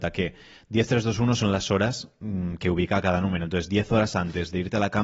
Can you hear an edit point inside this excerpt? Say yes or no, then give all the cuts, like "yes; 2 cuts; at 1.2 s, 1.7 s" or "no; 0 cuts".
no; 0 cuts